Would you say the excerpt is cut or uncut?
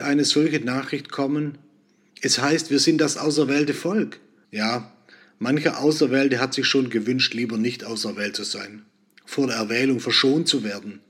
cut